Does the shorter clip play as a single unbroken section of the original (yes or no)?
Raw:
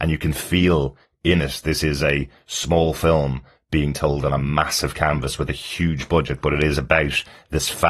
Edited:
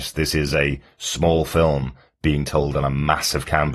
yes